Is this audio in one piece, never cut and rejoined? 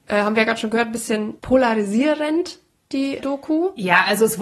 no; 2 cuts; at 1.4 s, 3.2 s

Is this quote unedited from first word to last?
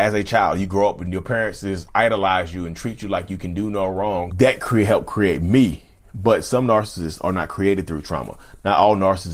no; 1 cut; at 4.3 s

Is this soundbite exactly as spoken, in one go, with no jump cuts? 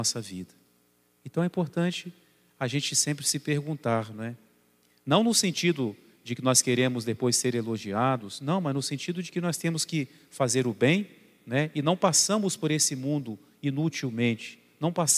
yes; 0 cuts

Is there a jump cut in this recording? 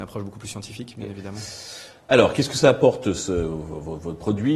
no; 0 cuts

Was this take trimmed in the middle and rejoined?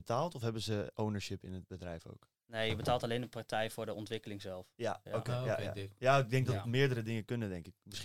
no; 0 cuts

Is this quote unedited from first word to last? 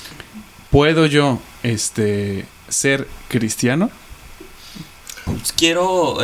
no; 1 cut; at 5.3 s

